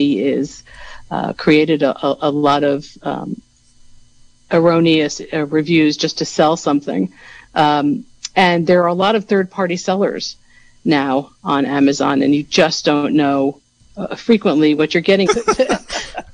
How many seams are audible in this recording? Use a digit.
1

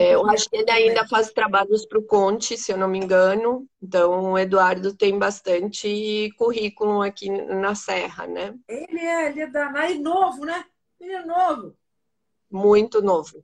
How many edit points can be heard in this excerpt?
1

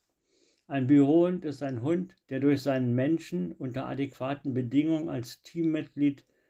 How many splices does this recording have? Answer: 1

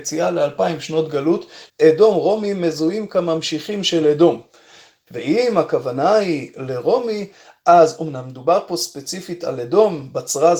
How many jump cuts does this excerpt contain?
2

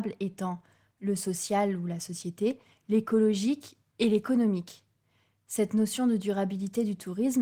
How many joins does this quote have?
0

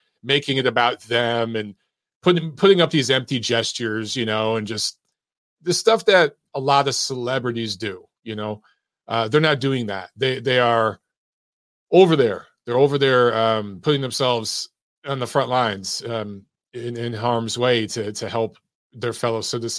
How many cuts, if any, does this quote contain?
0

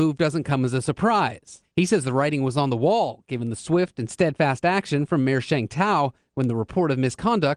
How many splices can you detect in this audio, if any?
1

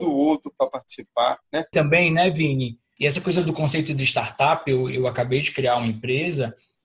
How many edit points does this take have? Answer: 2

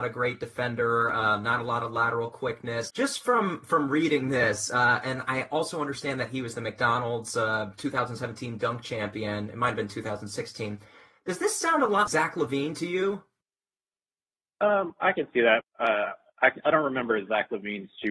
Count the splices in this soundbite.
3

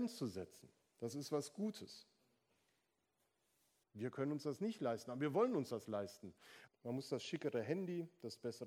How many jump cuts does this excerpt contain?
2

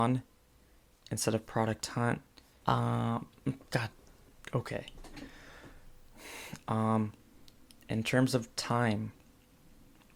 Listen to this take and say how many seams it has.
2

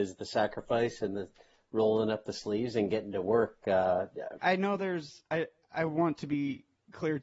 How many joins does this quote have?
1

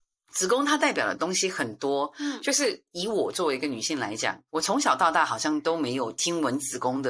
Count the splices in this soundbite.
1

